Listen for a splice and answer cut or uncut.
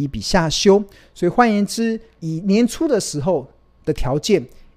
cut